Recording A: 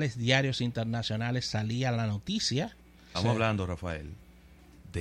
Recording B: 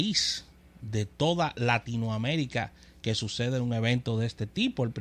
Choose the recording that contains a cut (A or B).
A